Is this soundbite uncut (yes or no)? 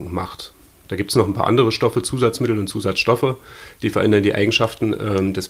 yes